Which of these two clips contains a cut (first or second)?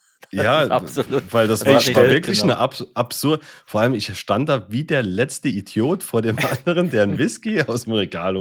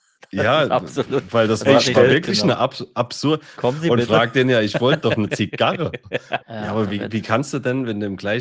second